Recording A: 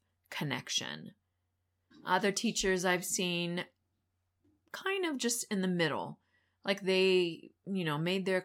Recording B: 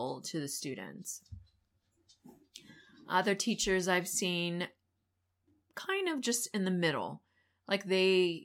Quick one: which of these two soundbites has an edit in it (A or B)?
A